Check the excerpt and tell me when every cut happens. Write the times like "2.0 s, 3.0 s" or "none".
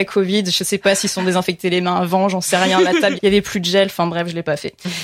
3.1 s